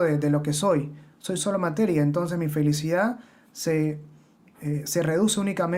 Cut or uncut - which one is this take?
uncut